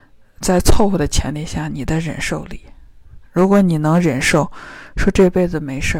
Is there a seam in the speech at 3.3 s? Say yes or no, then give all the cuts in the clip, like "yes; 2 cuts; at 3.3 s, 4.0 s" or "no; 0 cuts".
no; 0 cuts